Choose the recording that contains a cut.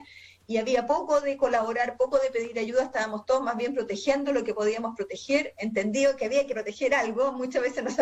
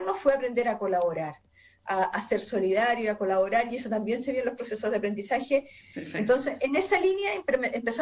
second; 1 cut; at 5.8 s

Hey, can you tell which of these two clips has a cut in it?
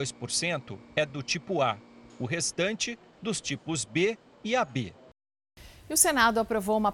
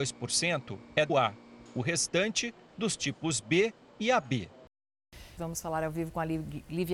second; 2 cuts; at 1.1 s, 5.4 s

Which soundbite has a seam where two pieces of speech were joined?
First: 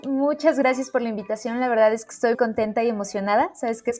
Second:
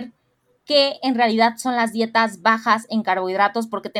first; 1 cut; at 2.3 s

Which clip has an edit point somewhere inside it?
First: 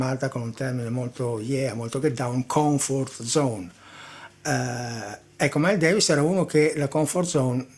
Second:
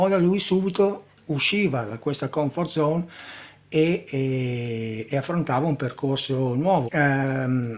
second; 1 cut; at 6.9 s

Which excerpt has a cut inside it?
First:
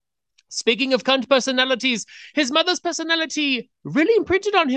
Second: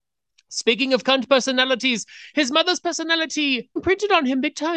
second; 1 cut; at 3.8 s

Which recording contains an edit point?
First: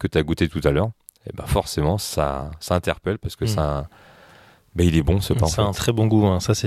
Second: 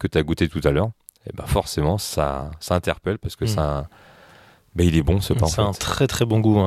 first; 1 cut; at 5.7 s

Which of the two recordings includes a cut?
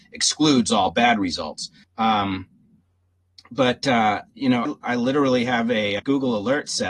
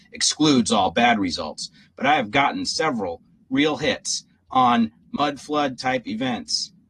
first; 3 cuts; at 1.8 s, 4.6 s, 6.0 s

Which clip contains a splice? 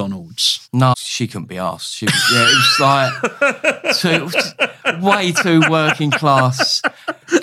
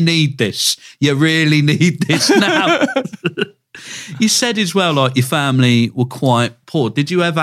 first; 1 cut; at 0.9 s

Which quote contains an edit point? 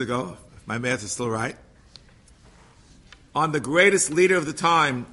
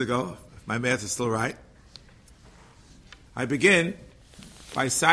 second; 1 cut; at 3.3 s

